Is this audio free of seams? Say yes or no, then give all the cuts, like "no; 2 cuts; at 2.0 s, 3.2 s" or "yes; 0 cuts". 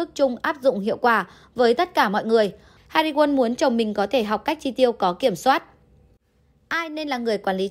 no; 1 cut; at 2.8 s